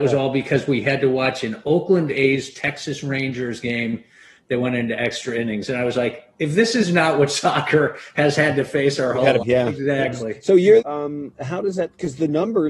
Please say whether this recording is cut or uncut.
cut